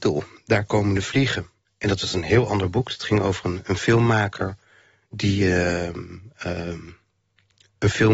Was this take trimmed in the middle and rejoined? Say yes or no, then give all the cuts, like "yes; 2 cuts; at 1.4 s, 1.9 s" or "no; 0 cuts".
no; 0 cuts